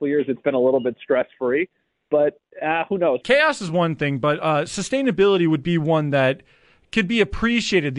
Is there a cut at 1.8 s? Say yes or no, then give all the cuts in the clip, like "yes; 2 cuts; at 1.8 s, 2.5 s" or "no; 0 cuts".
no; 1 cut; at 3.2 s